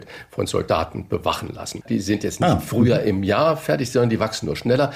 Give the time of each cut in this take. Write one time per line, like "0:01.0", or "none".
0:01.8